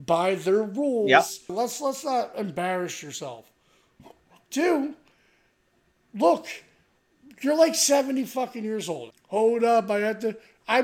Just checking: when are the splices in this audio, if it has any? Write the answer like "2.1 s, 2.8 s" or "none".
1.5 s, 9.1 s